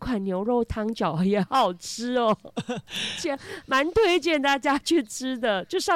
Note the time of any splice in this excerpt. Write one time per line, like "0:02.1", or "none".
0:01.5

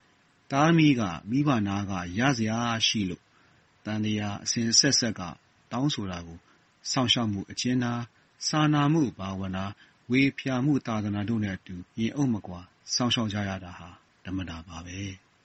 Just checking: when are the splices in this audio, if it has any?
0:11.9

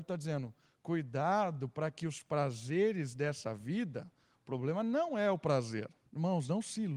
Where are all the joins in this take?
0:06.1

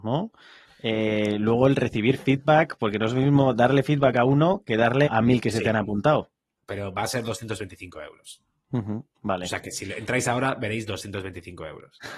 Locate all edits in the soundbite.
0:05.1
0:06.6

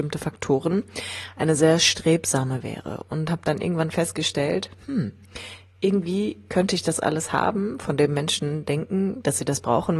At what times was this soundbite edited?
none

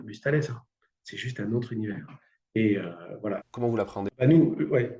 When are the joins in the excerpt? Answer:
0:03.4

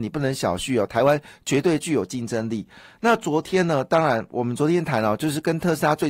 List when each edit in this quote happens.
none

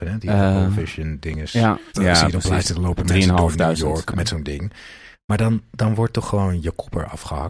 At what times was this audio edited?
0:01.9

